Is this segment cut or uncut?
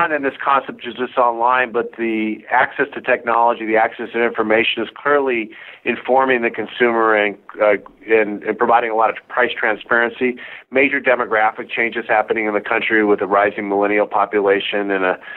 uncut